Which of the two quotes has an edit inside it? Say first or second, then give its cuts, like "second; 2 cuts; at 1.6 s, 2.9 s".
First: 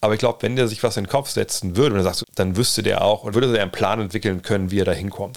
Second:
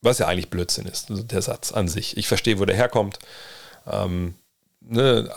first; 2 cuts; at 2.2 s, 3.3 s